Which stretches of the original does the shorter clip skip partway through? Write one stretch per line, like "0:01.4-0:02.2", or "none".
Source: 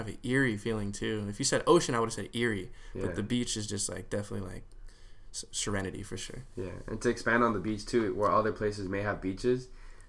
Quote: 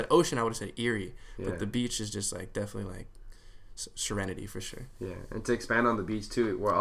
none